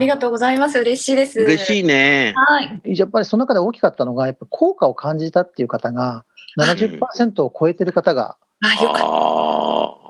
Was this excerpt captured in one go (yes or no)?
yes